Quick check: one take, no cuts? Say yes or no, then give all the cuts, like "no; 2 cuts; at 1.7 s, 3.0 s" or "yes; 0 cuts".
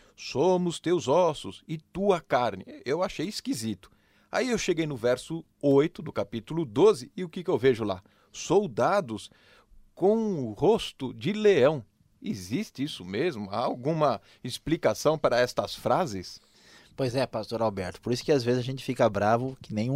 yes; 0 cuts